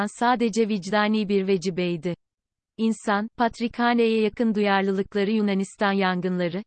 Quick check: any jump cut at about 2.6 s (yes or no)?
yes